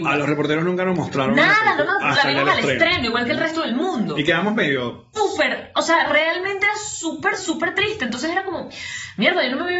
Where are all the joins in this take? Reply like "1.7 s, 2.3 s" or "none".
5.2 s, 7.4 s